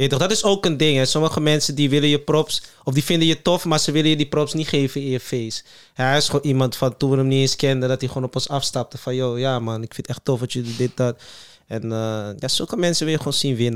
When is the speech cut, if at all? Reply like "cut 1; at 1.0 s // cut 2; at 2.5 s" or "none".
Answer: none